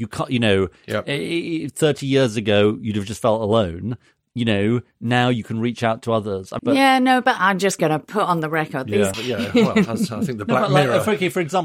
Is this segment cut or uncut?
cut